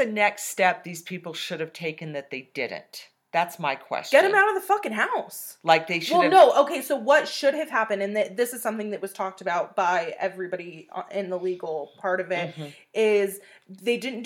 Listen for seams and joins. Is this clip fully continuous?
yes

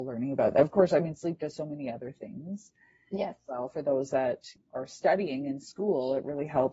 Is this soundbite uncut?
yes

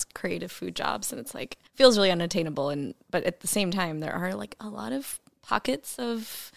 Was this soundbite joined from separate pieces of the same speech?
yes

